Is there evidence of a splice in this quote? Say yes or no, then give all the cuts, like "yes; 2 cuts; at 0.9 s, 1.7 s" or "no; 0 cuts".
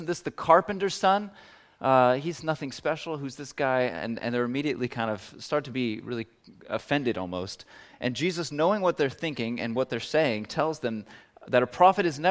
no; 0 cuts